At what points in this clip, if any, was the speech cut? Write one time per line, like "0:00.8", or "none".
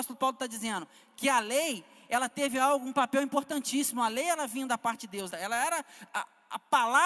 0:05.3